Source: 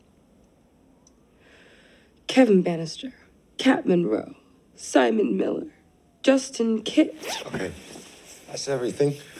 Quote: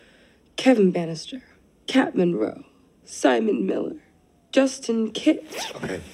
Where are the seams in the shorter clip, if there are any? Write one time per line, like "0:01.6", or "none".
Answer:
none